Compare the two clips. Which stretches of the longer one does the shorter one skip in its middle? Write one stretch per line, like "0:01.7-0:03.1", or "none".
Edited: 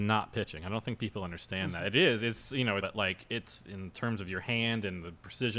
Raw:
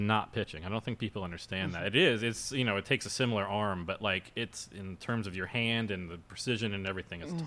0:02.8-0:03.9